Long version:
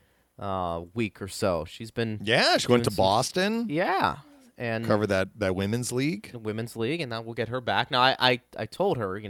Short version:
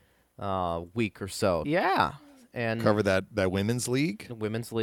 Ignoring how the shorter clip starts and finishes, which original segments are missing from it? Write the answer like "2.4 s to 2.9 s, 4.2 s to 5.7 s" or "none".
1.6 s to 3.7 s